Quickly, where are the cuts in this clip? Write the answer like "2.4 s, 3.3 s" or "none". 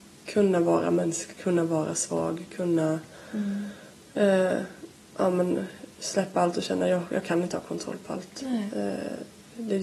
none